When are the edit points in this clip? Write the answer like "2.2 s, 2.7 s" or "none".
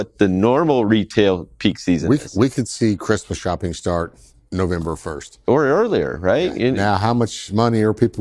none